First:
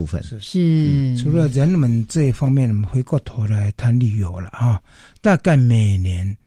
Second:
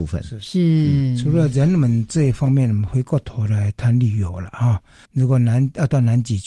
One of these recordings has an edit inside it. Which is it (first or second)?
second